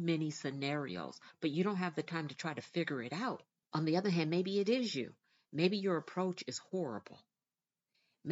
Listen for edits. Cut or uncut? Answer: cut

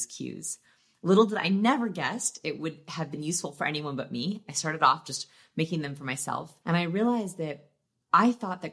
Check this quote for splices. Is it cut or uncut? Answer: cut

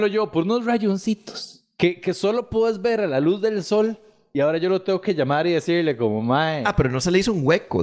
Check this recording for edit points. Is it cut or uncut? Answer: uncut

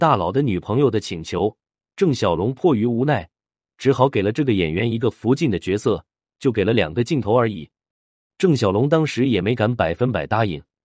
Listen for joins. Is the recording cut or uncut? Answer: cut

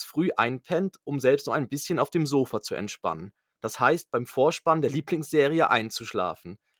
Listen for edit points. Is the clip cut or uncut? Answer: uncut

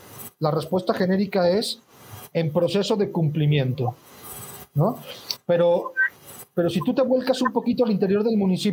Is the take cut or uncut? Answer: cut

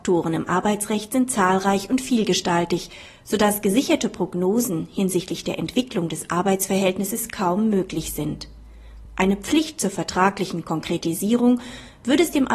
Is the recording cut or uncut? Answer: uncut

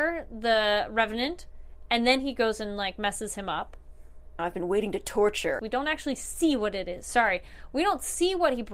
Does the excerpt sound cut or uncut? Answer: cut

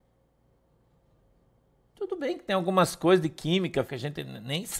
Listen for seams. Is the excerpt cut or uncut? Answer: cut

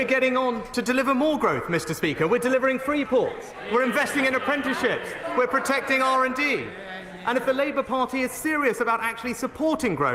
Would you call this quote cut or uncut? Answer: uncut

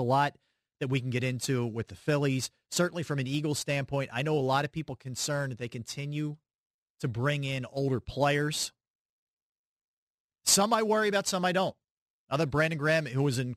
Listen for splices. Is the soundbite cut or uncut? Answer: uncut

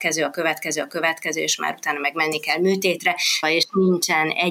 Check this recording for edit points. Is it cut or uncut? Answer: cut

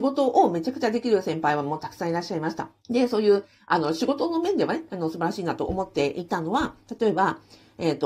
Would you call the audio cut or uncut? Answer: cut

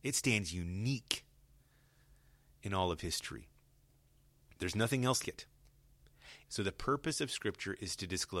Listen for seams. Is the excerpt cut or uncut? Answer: cut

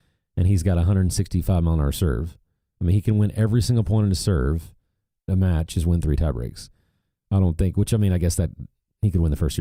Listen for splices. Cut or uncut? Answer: cut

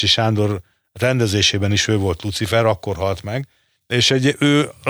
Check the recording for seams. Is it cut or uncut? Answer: uncut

